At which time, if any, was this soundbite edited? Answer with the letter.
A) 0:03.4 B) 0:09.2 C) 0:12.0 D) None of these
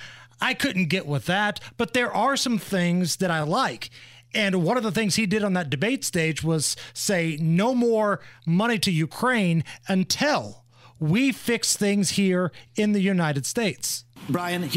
D